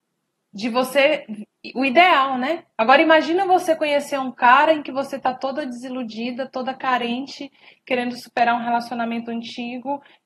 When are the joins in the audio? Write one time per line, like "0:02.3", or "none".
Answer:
0:02.7